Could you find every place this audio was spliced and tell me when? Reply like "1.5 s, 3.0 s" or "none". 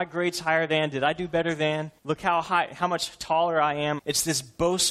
2.0 s, 4.0 s